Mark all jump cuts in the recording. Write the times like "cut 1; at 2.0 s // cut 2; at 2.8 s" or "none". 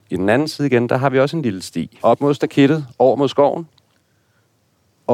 cut 1; at 2.0 s